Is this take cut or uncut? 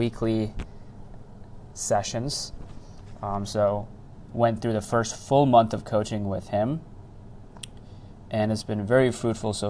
uncut